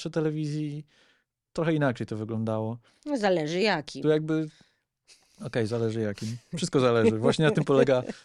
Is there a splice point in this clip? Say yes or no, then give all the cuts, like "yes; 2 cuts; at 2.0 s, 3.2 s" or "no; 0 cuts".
no; 0 cuts